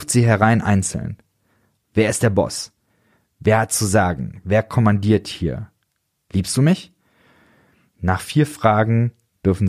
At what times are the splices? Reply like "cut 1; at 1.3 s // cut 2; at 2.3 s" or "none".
cut 1; at 1.8 s